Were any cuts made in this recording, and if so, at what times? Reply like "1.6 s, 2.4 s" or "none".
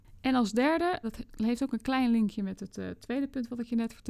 1.0 s